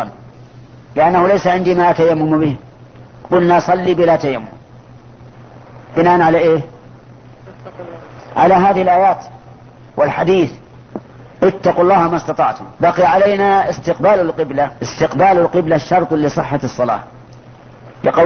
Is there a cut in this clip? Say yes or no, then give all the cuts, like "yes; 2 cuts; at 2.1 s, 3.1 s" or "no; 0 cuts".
yes; 2 cuts; at 12.8 s, 14.8 s